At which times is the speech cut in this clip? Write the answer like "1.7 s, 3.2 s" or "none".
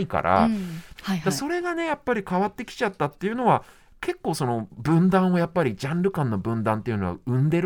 1.0 s